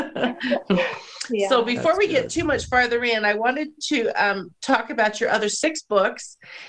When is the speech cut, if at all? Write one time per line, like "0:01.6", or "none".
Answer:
none